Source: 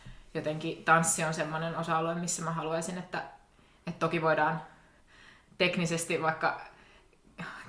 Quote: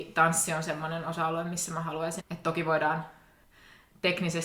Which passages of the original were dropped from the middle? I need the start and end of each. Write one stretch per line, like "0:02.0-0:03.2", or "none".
0:02.9-0:03.8